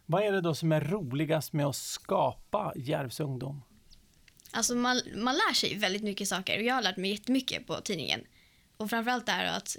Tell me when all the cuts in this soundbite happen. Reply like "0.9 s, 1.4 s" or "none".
none